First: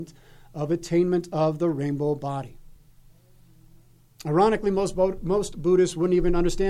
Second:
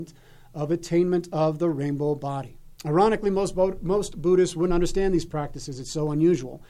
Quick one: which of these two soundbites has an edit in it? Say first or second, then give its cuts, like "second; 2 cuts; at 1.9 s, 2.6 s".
second; 2 cuts; at 2.8 s, 4.7 s